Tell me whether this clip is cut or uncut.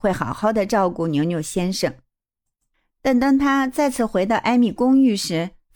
uncut